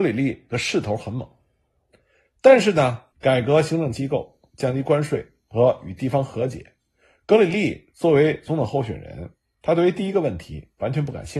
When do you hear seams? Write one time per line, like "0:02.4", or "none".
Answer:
0:03.1